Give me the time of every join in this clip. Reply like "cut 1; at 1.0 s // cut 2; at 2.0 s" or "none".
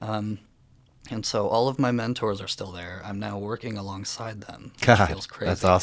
none